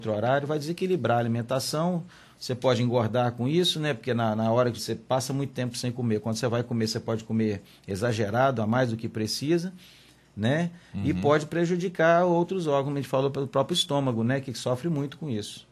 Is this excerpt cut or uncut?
cut